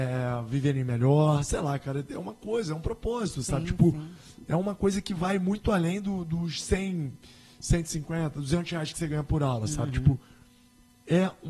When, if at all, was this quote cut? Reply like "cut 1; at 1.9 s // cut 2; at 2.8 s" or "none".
none